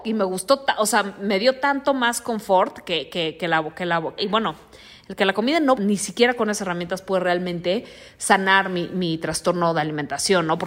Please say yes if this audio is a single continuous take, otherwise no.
no